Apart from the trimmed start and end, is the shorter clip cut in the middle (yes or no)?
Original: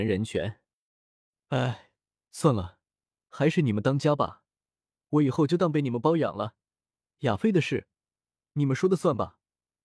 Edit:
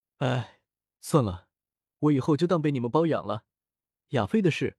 yes